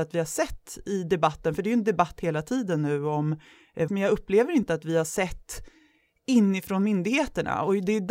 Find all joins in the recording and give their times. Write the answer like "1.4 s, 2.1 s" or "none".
3.9 s

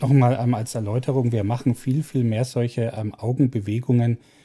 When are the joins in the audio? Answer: none

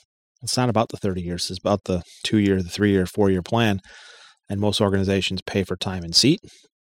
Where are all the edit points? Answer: none

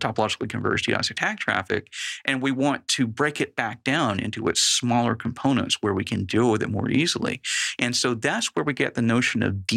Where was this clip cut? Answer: none

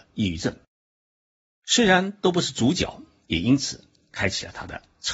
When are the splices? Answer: 3.2 s

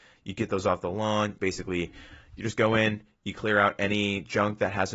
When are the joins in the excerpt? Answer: 1.4 s

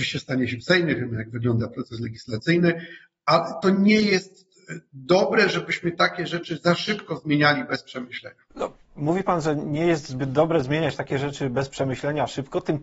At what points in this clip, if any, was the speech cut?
8.5 s

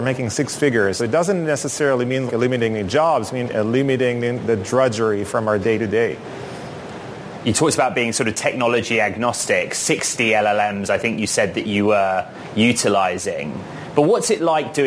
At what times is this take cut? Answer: 1.0 s, 2.3 s

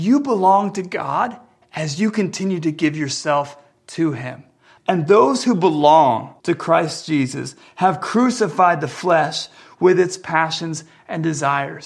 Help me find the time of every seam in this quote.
4.8 s, 6.4 s

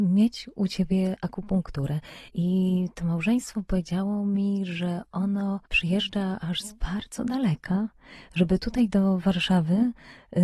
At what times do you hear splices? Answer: 2.3 s, 5.7 s

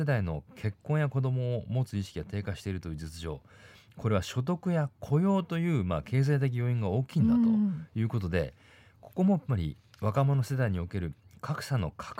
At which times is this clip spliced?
none

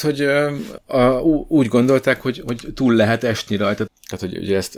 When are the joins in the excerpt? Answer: 3.9 s

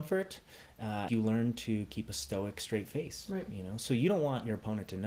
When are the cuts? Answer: 1.1 s

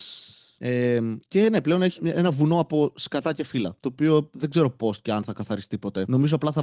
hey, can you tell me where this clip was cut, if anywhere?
2.0 s

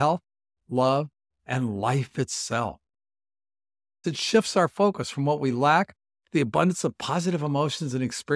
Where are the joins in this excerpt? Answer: 4.0 s

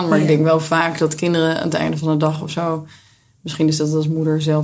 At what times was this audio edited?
none

